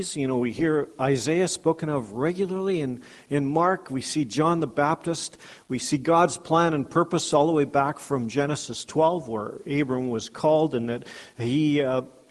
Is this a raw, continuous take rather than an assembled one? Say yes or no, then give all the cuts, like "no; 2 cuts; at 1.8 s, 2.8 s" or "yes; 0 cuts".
yes; 0 cuts